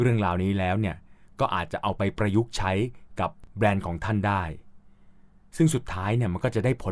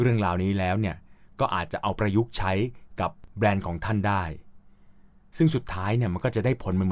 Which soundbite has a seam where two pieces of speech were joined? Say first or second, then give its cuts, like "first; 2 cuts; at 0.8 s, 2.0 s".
second; 1 cut; at 2.0 s